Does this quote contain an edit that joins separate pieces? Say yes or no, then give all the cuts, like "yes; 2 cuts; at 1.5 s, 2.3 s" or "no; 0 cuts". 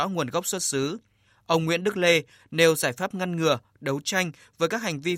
yes; 1 cut; at 2.4 s